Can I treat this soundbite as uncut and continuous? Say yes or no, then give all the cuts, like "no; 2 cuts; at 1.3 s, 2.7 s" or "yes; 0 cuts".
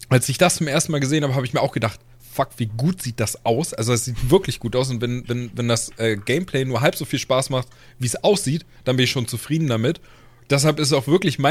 yes; 0 cuts